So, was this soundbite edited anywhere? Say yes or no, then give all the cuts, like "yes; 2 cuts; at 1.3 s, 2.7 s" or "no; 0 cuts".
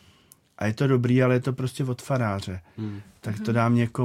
no; 0 cuts